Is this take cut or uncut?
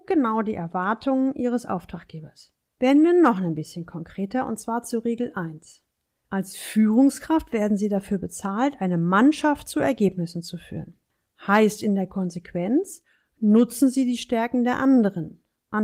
uncut